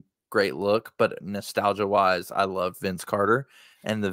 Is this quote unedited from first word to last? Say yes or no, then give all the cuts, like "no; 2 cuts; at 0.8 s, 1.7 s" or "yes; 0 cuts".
yes; 0 cuts